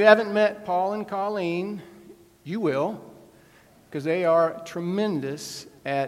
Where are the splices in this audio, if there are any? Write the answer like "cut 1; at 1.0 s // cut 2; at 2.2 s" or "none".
none